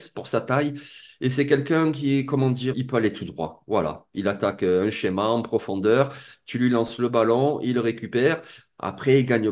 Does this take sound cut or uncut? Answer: cut